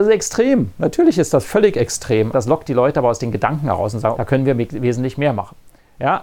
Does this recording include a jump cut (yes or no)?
yes